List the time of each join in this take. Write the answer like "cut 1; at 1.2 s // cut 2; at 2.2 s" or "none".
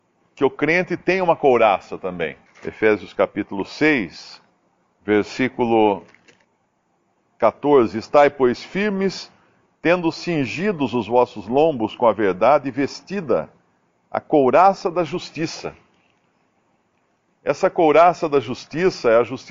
cut 1; at 2.5 s